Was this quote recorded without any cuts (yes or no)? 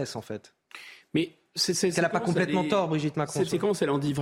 yes